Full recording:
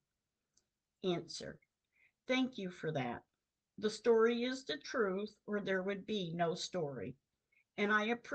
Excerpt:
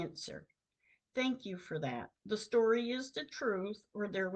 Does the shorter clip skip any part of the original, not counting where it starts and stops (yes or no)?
yes